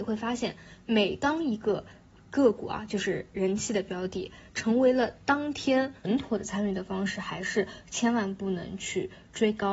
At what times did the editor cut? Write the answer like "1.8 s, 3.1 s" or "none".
4.5 s, 6.0 s